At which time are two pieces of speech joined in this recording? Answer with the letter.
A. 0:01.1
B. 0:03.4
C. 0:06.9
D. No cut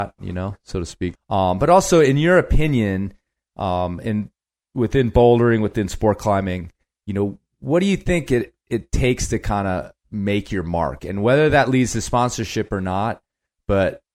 A